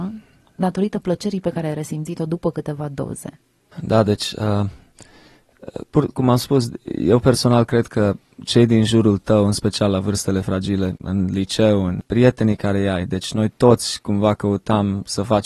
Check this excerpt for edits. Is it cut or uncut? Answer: cut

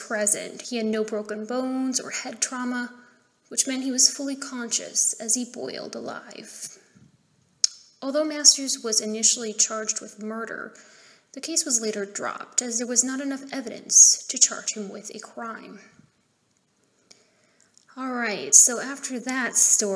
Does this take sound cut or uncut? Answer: uncut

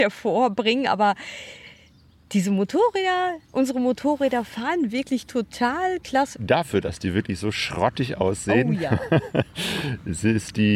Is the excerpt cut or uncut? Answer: cut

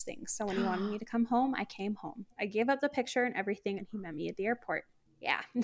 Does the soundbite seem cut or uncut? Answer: cut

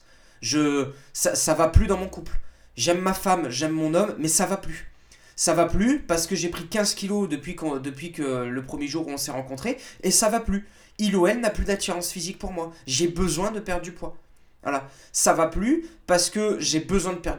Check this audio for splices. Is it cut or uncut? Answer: uncut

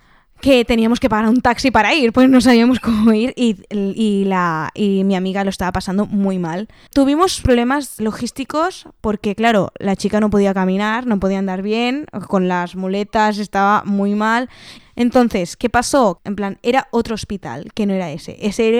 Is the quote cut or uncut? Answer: cut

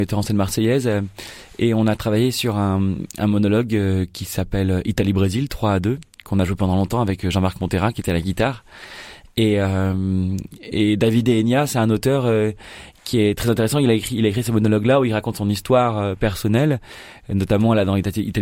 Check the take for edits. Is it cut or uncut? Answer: uncut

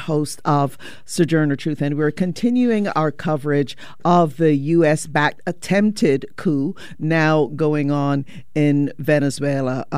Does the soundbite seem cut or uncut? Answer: uncut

